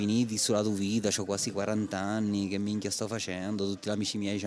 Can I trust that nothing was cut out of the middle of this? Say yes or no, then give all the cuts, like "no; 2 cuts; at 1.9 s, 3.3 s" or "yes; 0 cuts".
yes; 0 cuts